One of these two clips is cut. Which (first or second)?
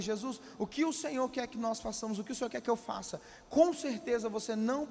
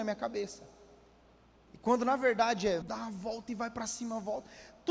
second